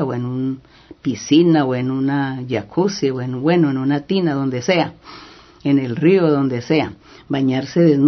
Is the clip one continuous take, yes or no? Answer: yes